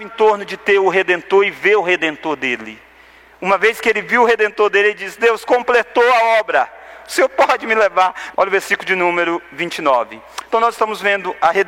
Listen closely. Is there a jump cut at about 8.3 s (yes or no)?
yes